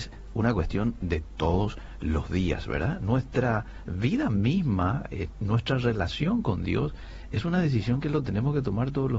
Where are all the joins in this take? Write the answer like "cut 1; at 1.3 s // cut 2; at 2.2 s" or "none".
none